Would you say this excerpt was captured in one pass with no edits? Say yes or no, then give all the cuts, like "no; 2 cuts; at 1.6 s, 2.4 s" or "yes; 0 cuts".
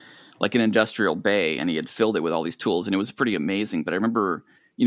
yes; 0 cuts